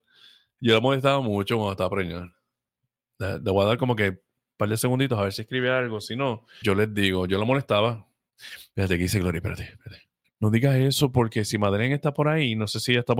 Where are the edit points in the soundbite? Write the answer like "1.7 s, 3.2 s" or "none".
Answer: 6.6 s, 8.7 s, 10.2 s